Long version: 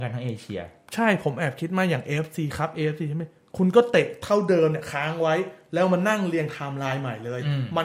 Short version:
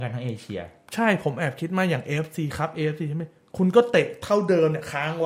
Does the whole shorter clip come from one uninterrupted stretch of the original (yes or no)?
yes